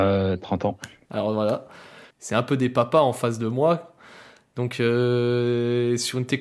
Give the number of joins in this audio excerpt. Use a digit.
1